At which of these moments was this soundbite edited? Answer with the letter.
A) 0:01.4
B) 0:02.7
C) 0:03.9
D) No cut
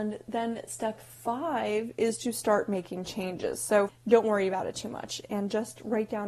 C